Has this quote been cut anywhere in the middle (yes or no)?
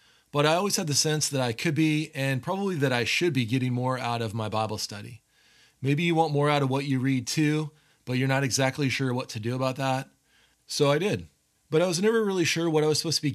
yes